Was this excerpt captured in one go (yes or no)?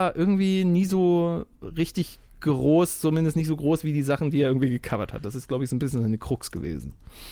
yes